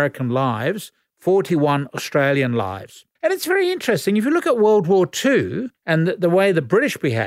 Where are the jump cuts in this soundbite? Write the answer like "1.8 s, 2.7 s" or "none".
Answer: 3.2 s, 5.8 s